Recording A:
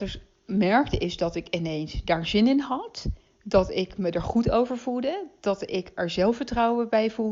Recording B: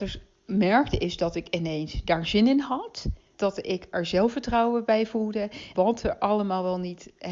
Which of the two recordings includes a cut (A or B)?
B